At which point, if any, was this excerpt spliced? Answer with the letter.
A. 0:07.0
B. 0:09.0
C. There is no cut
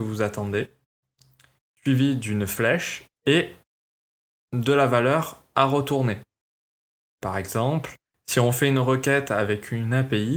A